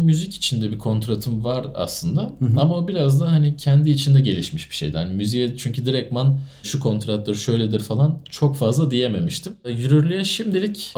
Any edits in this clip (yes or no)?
no